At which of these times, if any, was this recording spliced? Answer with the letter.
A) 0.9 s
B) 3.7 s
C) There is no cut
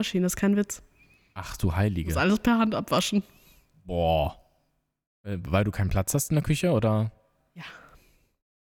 C